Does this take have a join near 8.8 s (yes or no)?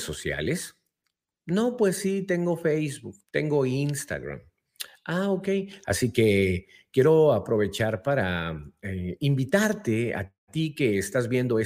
no